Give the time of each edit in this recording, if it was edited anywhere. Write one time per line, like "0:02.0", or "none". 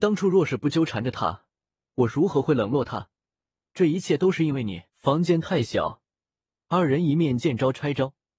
0:03.7
0:04.9